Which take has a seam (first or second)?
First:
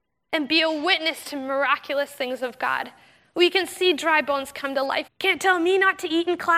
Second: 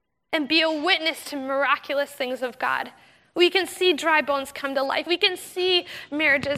first